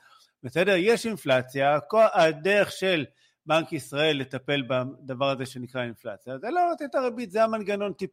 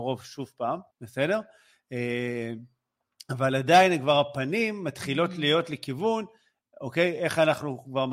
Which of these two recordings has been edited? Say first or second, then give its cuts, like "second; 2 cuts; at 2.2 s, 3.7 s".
second; 1 cut; at 0.9 s